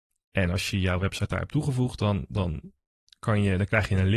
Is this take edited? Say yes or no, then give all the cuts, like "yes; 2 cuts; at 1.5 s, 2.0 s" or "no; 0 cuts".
no; 0 cuts